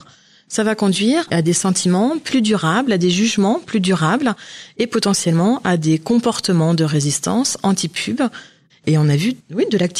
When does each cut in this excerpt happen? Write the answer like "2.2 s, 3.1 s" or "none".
8.7 s